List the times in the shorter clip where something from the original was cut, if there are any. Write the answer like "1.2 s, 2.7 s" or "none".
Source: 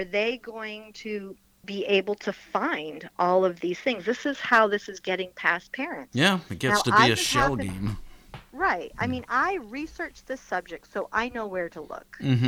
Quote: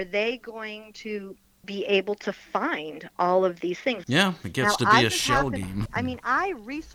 4.0 s, 5.9 s